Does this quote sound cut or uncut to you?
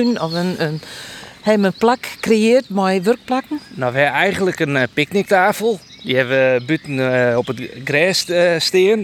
uncut